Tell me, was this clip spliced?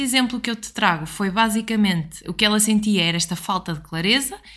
yes; 1 cut; at 2.2 s

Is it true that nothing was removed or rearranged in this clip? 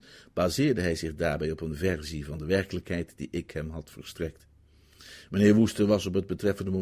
yes; 0 cuts

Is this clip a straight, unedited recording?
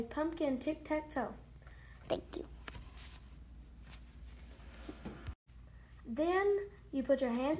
no; 2 cuts; at 2.0 s, 6.0 s

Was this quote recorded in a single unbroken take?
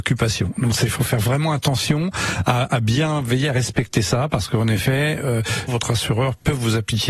no; 1 cut; at 5.7 s

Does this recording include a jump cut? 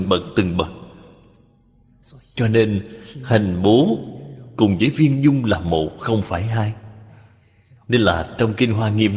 no; 0 cuts

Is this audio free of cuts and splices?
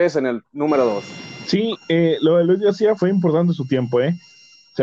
no; 1 cut; at 3.0 s

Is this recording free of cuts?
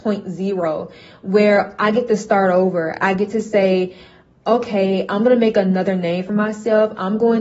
yes; 0 cuts

